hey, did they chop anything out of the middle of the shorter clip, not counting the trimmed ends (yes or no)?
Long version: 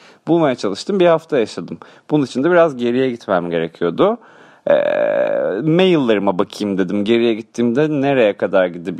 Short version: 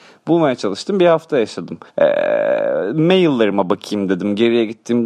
yes